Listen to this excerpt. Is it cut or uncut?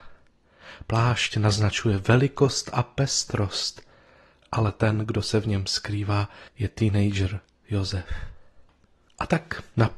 uncut